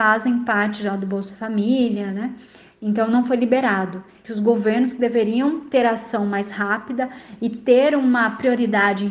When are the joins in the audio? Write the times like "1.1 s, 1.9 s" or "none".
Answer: 4.2 s